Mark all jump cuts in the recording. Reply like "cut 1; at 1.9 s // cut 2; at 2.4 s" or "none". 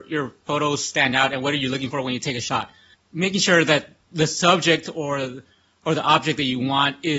cut 1; at 2.9 s